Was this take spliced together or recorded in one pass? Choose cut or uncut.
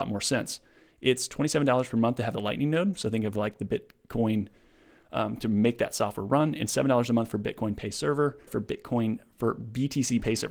cut